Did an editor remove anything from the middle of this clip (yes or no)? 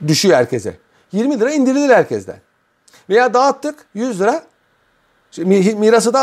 no